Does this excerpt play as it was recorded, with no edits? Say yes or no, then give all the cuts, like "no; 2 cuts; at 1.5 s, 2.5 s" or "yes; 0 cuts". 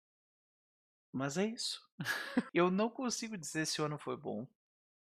no; 1 cut; at 2.5 s